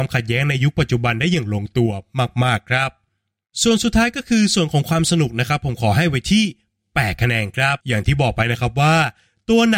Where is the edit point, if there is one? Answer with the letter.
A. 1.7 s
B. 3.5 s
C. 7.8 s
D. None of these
C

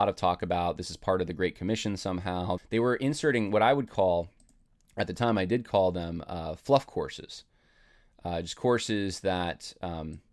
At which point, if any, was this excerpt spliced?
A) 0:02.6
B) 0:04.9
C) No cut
A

